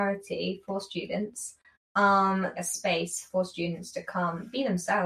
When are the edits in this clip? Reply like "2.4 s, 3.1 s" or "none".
2.6 s